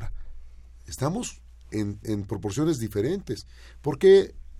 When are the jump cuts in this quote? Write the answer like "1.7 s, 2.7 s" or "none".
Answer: 2.0 s